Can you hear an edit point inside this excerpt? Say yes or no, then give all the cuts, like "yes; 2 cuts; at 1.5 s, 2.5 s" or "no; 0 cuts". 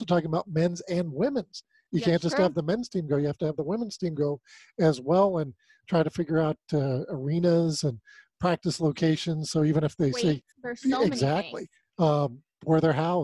yes; 1 cut; at 10.5 s